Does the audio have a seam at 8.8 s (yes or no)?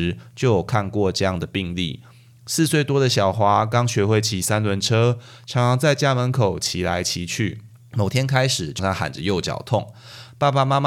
yes